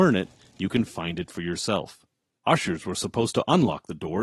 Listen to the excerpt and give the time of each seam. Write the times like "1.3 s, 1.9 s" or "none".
2.4 s